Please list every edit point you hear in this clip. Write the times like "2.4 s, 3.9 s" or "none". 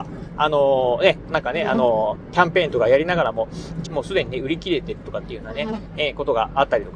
1.3 s, 3.9 s